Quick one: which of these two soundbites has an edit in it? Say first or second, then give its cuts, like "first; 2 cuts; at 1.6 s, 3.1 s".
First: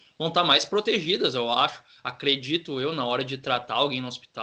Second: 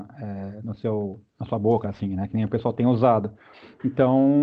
second; 1 cut; at 1.8 s